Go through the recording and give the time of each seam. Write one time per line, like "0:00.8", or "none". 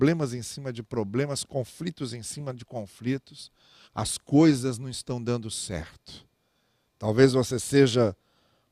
0:03.9
0:06.9